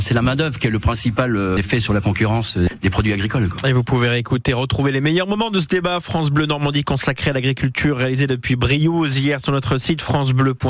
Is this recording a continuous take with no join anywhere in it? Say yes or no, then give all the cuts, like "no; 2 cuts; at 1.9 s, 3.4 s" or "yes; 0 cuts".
yes; 0 cuts